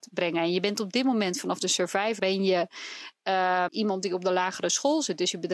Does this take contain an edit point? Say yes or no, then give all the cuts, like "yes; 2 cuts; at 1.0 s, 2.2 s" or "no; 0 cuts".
yes; 2 cuts; at 2.2 s, 3.7 s